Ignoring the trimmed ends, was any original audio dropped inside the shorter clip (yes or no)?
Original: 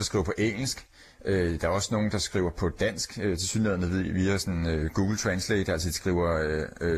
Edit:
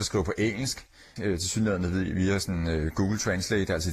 yes